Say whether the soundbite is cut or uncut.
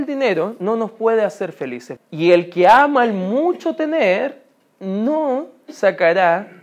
cut